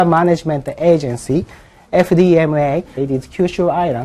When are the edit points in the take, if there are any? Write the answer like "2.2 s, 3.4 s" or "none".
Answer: 3.0 s